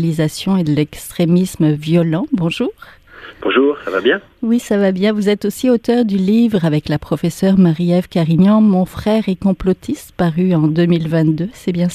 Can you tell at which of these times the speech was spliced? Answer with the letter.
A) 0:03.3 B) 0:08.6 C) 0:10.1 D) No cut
D